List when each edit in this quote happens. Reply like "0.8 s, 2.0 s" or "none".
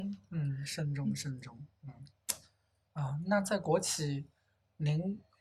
none